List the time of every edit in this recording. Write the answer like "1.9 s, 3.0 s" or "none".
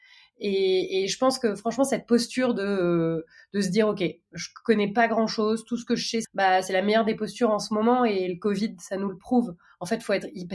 6.2 s

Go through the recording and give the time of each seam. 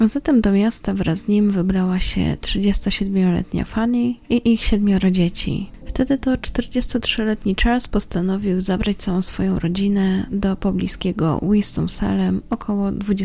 5.8 s

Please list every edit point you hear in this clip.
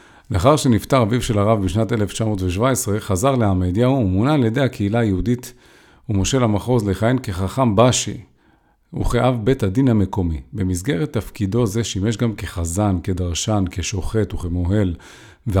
none

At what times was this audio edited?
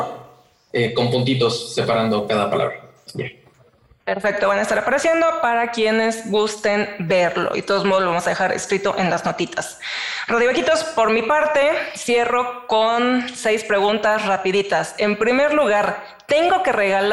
none

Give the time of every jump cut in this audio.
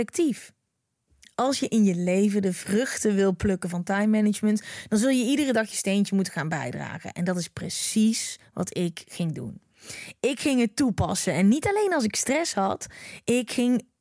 none

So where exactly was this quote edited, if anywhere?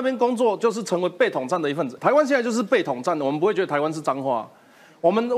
2.0 s

